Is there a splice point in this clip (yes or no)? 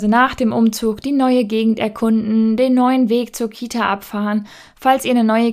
no